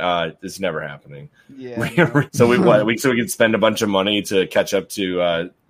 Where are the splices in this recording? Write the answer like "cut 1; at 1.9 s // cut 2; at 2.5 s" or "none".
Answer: cut 1; at 2.3 s